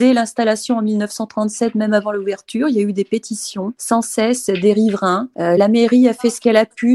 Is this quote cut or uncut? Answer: uncut